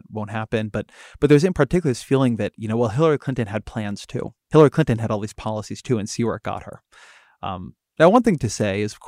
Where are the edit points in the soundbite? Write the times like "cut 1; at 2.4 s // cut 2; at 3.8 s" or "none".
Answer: cut 1; at 4.4 s